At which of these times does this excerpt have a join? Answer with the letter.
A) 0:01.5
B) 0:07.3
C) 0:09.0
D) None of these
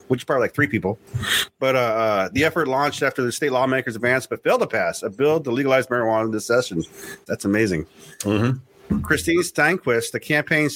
B